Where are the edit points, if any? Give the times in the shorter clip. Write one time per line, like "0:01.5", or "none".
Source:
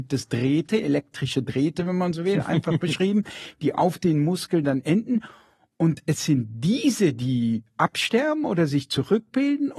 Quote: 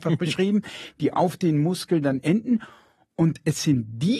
none